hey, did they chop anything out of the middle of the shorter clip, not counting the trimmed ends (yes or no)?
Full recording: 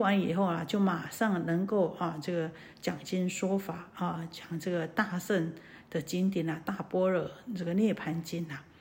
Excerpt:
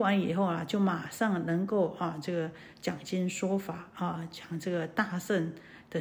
no